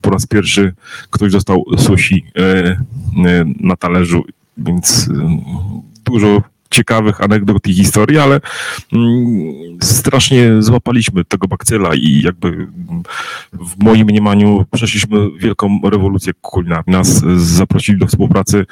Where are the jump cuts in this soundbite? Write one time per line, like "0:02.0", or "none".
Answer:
0:16.9